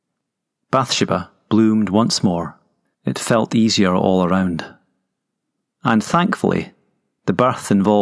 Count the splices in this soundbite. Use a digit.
1